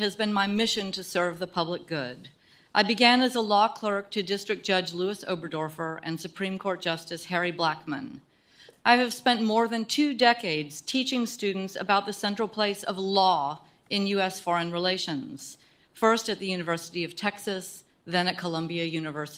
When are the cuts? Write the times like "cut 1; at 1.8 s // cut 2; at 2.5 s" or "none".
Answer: none

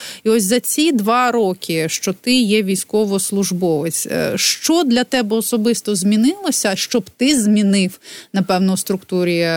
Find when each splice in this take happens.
none

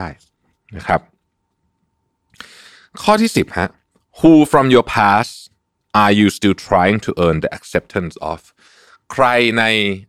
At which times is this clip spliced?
none

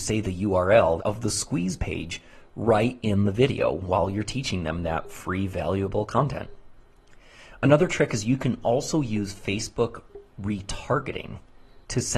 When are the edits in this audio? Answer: cut 1; at 1.0 s

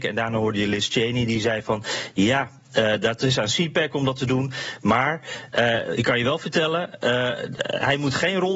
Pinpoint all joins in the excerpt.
none

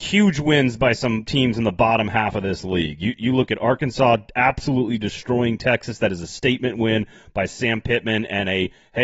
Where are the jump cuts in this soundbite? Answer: none

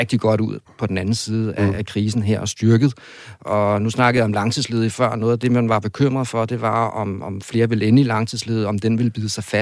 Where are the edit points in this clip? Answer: none

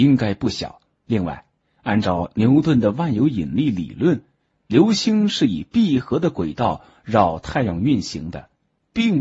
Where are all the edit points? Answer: cut 1; at 0.9 s

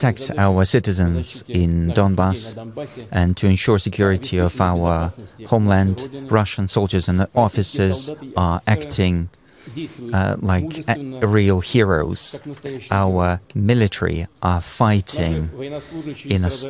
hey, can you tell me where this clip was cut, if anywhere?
none

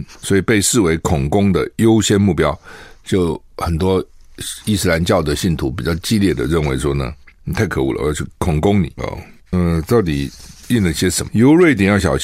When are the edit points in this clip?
cut 1; at 9.0 s // cut 2; at 11.3 s

